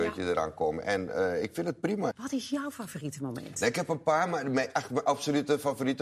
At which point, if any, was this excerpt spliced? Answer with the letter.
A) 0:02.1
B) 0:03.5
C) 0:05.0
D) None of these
A